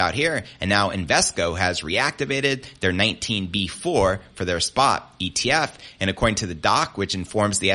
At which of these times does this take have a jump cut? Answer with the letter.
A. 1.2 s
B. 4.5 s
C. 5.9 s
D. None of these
D